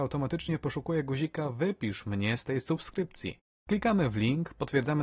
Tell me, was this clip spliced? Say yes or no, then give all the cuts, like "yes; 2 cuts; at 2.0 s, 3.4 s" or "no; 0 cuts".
yes; 1 cut; at 3.6 s